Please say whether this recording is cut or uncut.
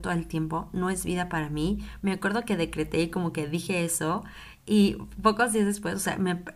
cut